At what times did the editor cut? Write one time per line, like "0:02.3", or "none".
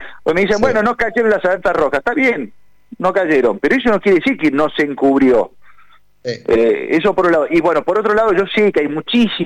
none